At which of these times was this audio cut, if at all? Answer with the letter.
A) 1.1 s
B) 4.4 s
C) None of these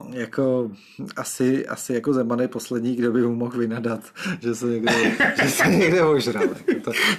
C